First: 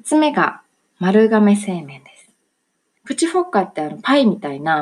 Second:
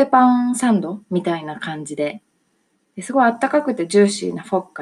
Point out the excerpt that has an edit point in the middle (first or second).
first